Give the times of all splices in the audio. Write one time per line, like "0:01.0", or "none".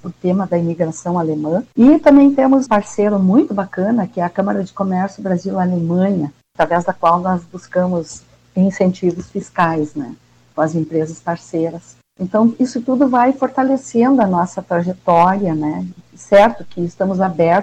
0:02.7